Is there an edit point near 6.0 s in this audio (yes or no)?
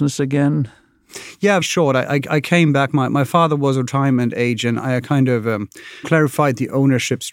yes